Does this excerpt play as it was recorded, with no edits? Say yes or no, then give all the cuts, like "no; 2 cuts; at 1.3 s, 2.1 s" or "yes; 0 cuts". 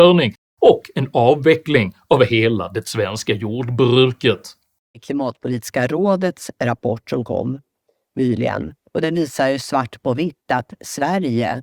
yes; 0 cuts